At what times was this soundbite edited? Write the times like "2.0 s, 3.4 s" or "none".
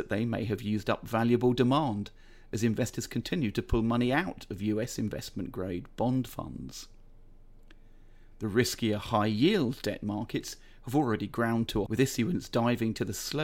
11.9 s